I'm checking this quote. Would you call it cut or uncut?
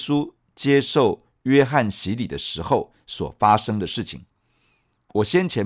uncut